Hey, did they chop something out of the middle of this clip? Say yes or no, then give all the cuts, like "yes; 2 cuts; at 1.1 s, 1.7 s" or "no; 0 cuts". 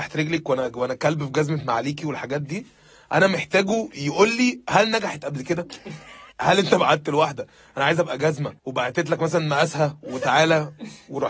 yes; 2 cuts; at 6.3 s, 8.6 s